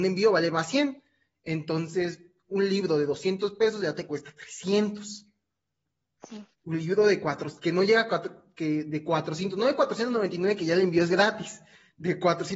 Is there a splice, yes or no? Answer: no